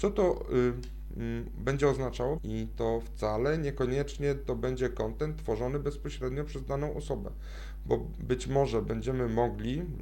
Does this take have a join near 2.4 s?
yes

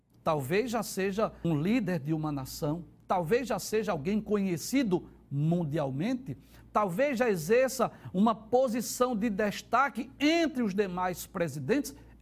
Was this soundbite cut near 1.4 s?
yes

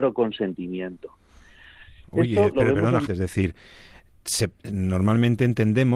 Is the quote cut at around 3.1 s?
yes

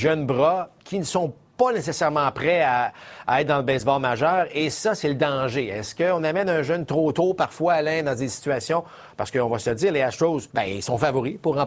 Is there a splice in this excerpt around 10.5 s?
yes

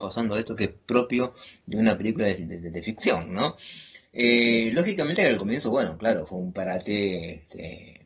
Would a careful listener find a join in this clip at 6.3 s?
yes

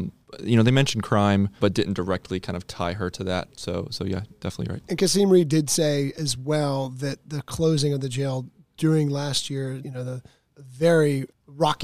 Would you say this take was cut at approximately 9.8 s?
yes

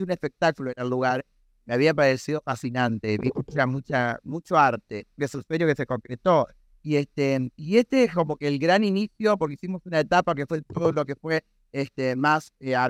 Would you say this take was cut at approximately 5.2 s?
yes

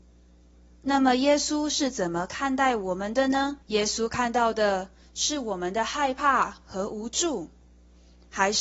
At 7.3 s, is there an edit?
no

